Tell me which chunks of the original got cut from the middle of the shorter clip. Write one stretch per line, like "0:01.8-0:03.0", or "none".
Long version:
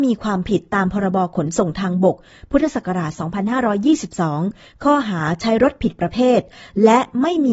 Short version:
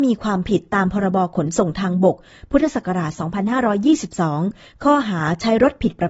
none

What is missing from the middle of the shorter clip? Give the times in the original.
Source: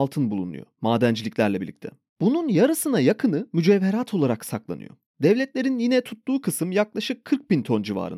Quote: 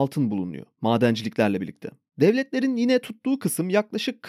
0:02.1-0:05.1

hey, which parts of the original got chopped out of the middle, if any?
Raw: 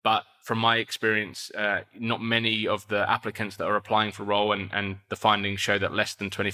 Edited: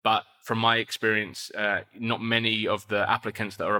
none

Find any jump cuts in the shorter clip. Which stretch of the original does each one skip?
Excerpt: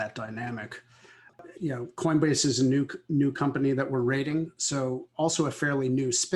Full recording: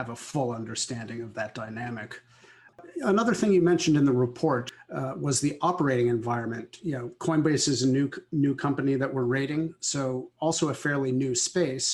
0:03.0-0:06.8

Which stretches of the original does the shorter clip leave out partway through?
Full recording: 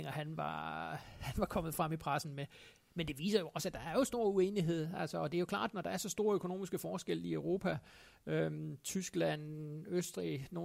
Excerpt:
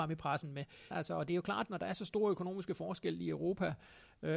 0:02.7-0:04.9

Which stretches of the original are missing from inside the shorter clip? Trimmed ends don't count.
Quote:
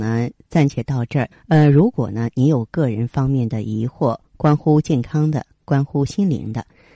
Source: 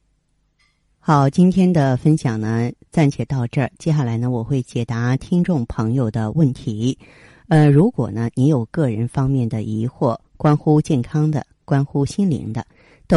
0:03.7-0:07.3

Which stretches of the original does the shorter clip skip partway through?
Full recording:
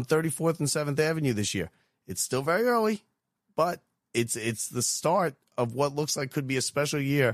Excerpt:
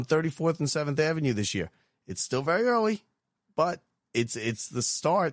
none

